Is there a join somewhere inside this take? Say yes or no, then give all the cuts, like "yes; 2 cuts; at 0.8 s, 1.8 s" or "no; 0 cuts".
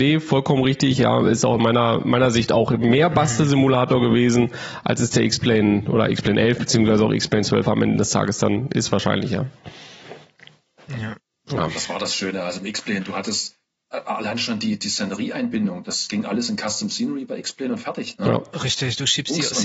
no; 0 cuts